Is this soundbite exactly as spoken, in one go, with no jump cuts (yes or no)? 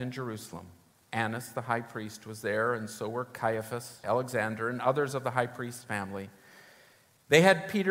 no